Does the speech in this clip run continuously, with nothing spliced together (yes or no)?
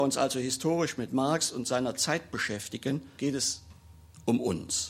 no